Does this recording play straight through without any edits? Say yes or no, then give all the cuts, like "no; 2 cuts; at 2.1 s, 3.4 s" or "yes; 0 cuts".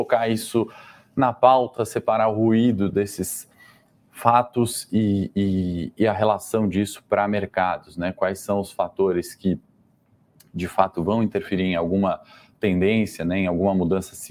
yes; 0 cuts